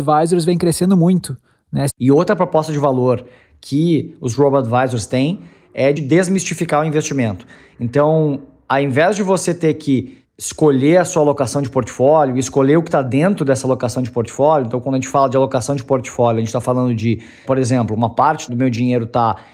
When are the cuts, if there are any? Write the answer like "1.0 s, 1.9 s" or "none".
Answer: 1.9 s, 6.0 s